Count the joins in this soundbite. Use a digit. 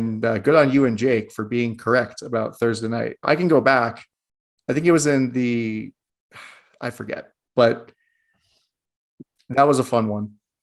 1